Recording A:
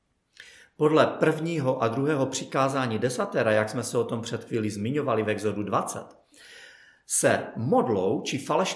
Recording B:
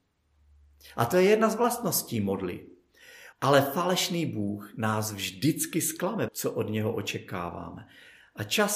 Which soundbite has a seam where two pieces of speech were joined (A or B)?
B